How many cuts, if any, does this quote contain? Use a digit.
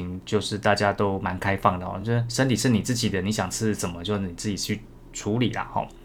0